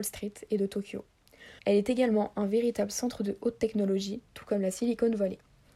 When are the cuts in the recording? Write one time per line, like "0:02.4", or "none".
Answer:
0:01.6